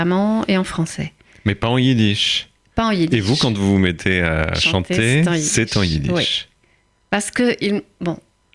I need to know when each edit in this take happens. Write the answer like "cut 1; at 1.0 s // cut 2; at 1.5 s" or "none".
none